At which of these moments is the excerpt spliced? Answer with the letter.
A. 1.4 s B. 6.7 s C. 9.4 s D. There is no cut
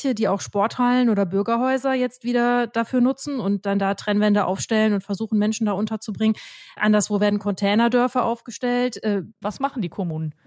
C